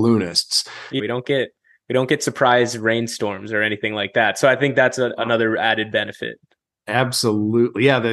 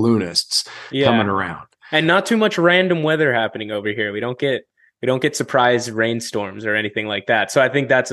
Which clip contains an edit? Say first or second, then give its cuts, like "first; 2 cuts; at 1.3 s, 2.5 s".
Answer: first; 1 cut; at 1.0 s